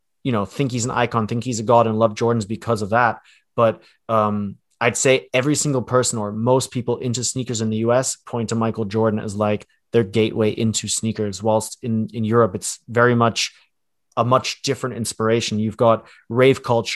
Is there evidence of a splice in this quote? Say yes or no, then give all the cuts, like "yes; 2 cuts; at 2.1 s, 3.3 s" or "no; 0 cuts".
no; 0 cuts